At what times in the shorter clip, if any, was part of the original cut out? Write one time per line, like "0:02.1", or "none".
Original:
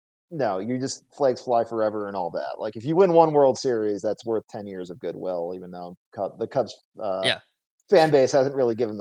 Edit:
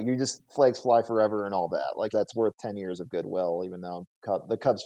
0:02.1